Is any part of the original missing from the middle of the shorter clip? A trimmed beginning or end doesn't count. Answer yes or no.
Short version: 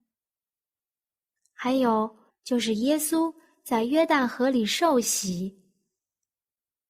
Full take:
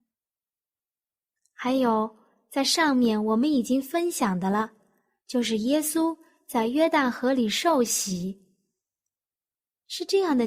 yes